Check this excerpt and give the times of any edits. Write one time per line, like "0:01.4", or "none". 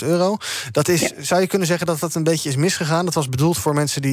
none